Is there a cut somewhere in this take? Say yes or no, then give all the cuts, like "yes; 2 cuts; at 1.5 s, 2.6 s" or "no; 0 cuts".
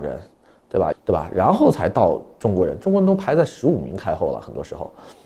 yes; 1 cut; at 0.9 s